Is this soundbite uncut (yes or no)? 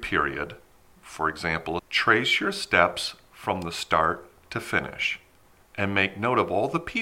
no